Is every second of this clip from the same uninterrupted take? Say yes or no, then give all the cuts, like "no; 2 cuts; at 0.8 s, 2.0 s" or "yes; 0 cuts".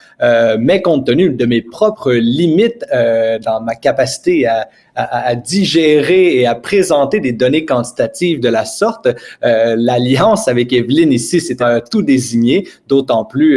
no; 1 cut; at 11.6 s